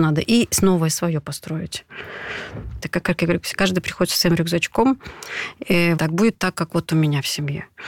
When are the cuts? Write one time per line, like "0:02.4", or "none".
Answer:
0:02.8
0:06.0